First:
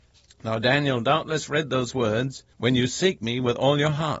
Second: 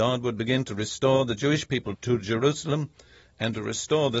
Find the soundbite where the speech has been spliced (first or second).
first